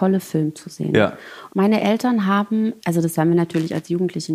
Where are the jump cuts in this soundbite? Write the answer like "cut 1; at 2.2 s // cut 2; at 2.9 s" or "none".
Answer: cut 1; at 1.5 s // cut 2; at 2.8 s